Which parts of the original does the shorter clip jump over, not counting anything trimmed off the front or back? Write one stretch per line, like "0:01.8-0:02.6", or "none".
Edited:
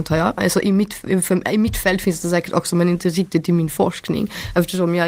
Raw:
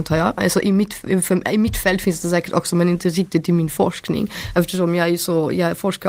none